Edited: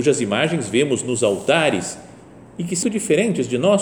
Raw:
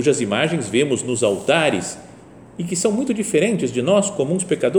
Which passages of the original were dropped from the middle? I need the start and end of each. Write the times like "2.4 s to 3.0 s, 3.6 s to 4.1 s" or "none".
2.8 s to 3.1 s

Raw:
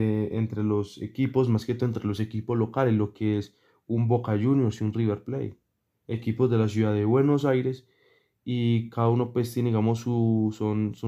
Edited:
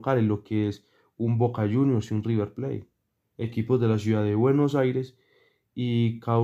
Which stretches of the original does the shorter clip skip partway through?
none

